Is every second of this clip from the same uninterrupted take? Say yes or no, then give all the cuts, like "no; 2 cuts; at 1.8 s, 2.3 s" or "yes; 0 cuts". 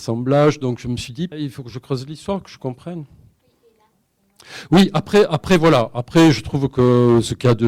no; 1 cut; at 1.3 s